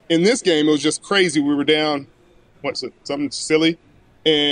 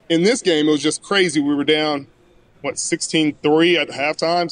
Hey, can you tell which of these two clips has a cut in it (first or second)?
first